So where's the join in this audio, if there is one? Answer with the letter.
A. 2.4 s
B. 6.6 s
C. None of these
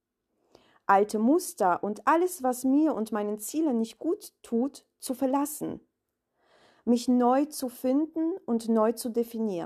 C